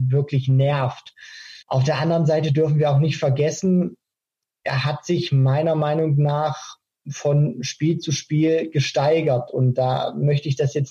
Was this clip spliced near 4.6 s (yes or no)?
no